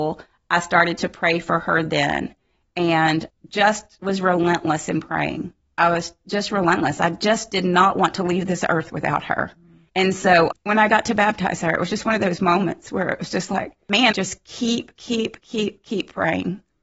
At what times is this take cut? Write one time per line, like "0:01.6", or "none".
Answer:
0:14.1

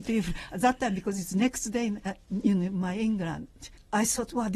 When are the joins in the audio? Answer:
0:02.1

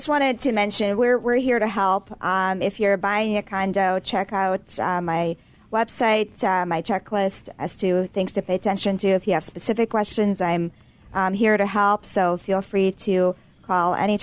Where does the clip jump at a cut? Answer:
none

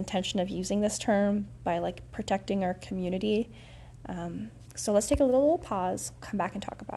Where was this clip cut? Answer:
none

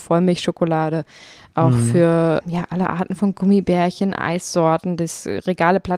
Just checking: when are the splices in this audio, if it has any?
0:02.4

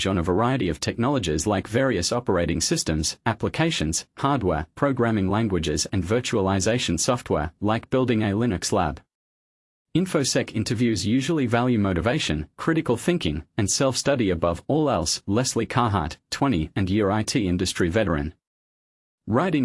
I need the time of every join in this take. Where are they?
none

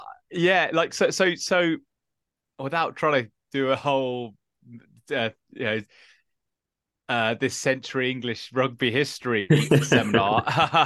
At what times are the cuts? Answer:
none

